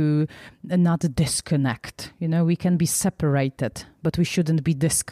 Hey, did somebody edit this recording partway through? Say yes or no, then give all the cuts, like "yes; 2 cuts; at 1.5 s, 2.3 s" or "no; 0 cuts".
no; 0 cuts